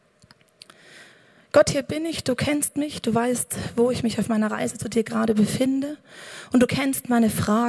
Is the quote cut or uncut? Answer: uncut